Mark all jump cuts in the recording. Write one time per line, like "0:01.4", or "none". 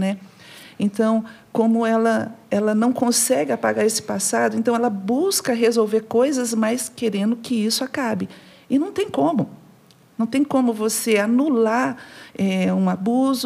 none